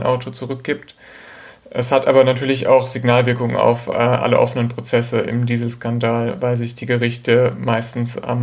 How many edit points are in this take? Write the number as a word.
zero